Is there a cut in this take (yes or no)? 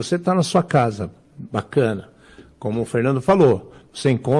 no